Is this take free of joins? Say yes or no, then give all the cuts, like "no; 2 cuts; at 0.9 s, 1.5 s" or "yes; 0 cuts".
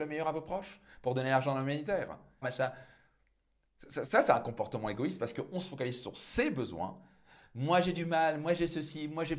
no; 2 cuts; at 2.4 s, 4.0 s